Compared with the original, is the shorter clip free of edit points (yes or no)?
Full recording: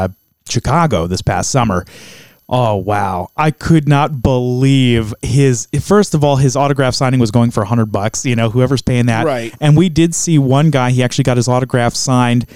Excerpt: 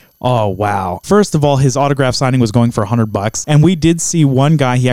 no